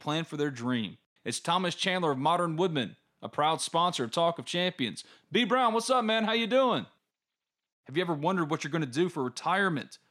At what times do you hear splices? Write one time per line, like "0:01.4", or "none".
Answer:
0:01.2
0:07.7